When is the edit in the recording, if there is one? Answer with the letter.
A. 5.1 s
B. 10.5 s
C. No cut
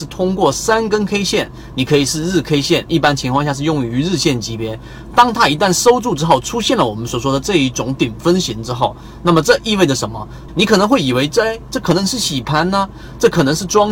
B